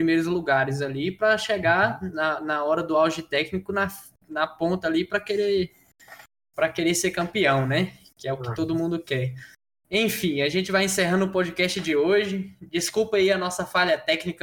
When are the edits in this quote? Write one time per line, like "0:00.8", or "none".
none